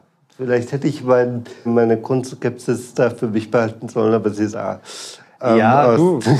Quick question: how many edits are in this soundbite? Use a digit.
2